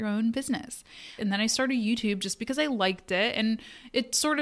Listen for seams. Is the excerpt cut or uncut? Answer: cut